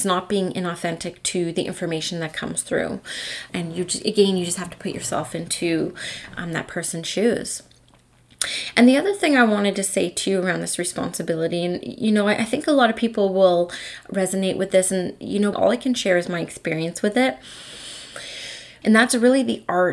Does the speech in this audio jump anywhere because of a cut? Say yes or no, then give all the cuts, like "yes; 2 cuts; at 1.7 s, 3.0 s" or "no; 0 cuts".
yes; 3 cuts; at 3.5 s, 15.5 s, 18.8 s